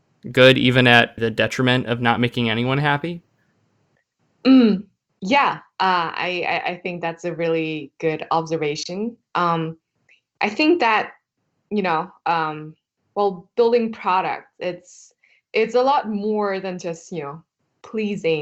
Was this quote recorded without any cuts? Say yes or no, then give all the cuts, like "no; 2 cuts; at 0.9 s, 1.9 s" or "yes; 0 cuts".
no; 1 cut; at 1.2 s